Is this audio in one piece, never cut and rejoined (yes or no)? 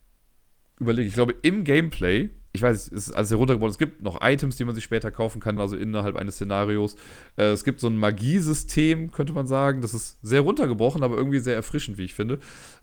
no